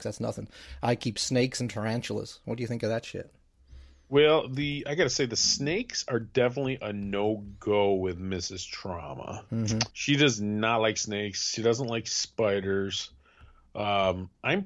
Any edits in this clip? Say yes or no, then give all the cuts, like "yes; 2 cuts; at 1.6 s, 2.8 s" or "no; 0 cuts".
yes; 1 cut; at 9.9 s